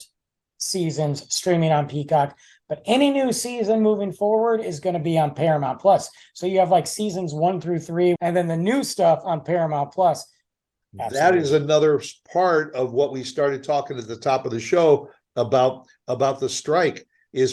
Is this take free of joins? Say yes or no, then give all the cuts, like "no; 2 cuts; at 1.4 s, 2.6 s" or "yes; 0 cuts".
no; 2 cuts; at 8.2 s, 10.8 s